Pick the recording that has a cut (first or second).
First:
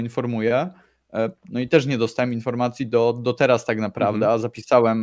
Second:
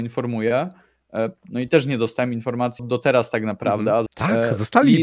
second